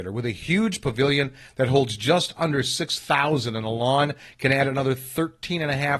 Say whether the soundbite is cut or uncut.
uncut